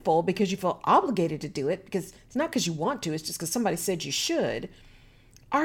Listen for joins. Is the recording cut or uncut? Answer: uncut